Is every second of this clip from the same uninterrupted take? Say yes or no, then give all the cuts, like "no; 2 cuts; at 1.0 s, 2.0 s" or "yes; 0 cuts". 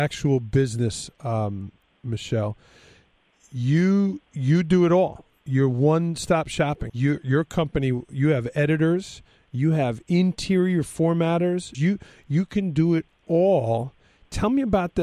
no; 2 cuts; at 6.9 s, 11.7 s